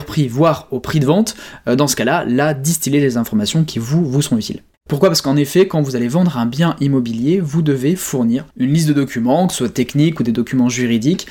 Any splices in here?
yes; 2 cuts; at 4.9 s, 8.5 s

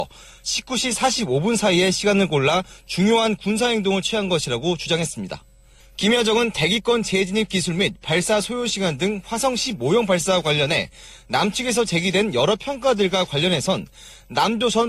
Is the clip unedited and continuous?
no; 1 cut; at 5.8 s

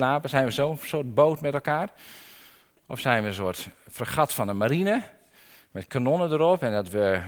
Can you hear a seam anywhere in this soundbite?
no; 0 cuts

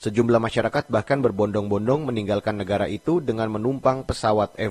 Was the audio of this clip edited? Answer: no; 0 cuts

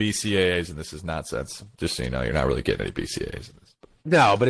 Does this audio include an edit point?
no; 0 cuts

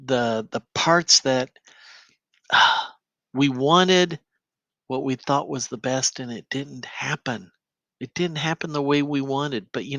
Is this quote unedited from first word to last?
yes; 0 cuts

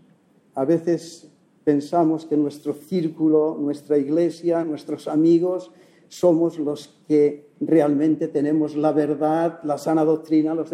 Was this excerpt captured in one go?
no; 1 cut; at 4.6 s

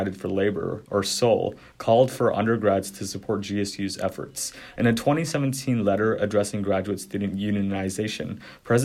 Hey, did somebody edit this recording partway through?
yes; 1 cut; at 4.8 s

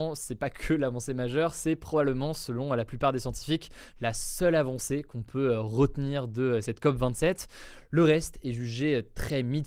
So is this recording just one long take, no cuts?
yes; 0 cuts

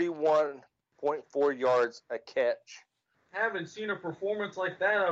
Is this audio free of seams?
no; 1 cut; at 3.1 s

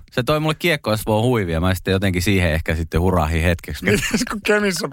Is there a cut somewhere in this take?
yes; 1 cut; at 3.8 s

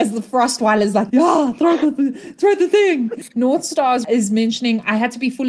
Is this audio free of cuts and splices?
no; 2 cuts; at 1.1 s, 3.3 s

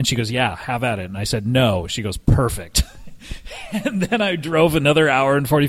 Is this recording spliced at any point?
no; 0 cuts

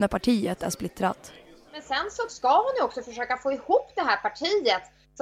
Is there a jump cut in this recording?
no; 0 cuts

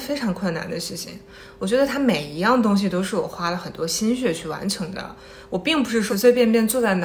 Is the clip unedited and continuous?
no; 1 cut; at 6.1 s

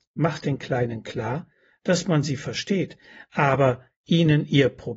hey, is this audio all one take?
yes; 0 cuts

